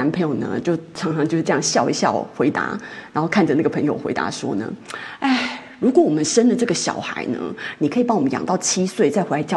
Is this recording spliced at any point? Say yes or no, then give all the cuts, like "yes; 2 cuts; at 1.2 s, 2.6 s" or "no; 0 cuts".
no; 0 cuts